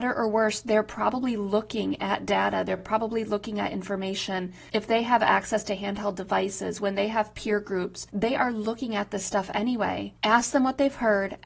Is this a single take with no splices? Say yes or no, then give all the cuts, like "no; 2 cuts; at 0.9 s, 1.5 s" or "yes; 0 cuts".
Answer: yes; 0 cuts